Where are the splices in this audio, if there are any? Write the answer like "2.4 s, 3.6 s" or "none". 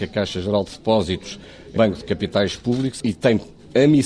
1.8 s